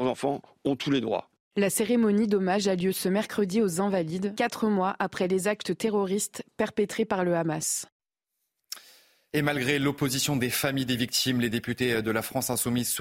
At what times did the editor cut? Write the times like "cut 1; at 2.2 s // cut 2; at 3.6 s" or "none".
none